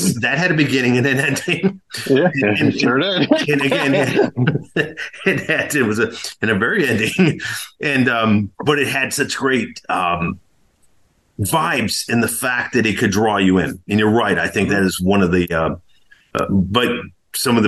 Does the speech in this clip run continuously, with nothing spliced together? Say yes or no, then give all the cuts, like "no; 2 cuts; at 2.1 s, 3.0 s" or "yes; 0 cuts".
no; 1 cut; at 8.5 s